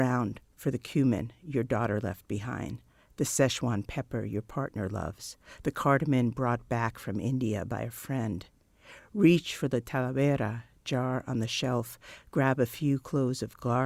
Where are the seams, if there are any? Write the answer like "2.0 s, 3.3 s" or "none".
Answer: none